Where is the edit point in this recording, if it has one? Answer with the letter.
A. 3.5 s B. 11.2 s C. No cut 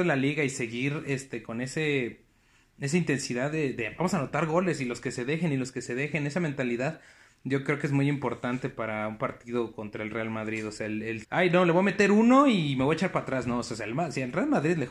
B